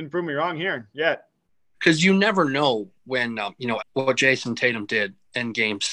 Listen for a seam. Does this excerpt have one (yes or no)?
yes